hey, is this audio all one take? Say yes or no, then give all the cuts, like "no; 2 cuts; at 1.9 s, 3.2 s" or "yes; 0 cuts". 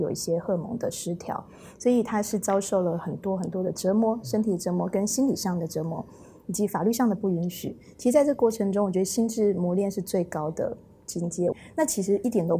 no; 1 cut; at 11.5 s